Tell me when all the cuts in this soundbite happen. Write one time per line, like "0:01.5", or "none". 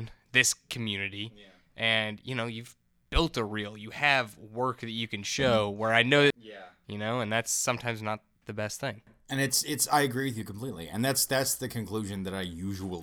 0:06.3